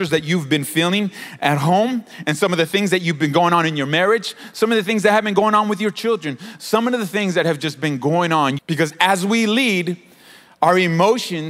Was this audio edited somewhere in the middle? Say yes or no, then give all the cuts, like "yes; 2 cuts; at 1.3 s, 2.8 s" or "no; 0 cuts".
yes; 1 cut; at 8.6 s